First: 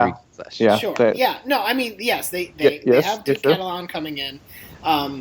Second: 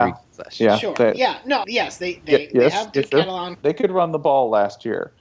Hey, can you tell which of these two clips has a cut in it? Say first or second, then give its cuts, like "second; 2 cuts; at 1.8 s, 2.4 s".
second; 2 cuts; at 1.6 s, 3.5 s